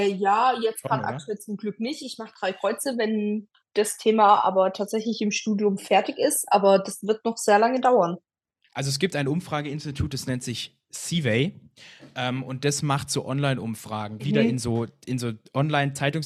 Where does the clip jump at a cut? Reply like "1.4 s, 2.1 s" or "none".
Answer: 14.2 s